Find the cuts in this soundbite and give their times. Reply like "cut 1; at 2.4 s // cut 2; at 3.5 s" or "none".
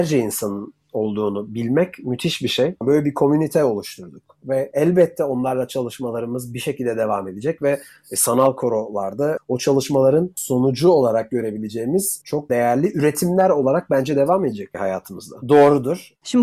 cut 1; at 15.4 s